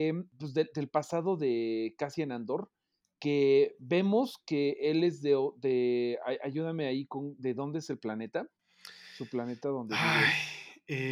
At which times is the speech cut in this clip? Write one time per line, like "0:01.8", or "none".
none